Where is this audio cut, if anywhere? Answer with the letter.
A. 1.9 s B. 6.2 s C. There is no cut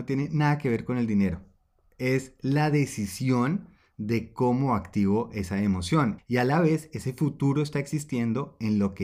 B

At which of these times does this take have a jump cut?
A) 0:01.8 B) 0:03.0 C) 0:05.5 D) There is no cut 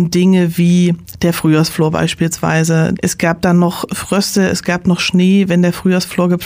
B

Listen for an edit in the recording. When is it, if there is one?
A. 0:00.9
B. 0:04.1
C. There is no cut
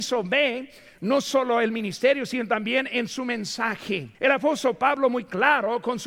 B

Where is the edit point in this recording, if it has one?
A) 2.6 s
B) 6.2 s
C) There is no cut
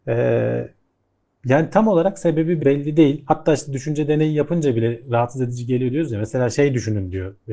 A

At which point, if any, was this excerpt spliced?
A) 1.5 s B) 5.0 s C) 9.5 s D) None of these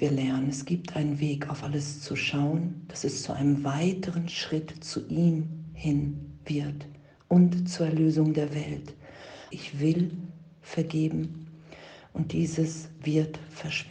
C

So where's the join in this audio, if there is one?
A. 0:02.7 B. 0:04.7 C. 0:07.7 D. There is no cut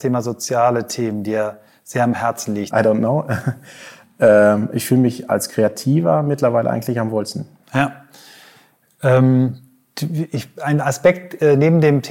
A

